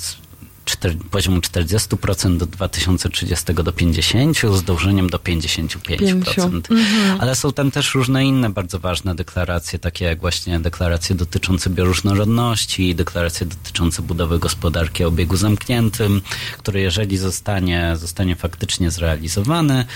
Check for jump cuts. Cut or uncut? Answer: cut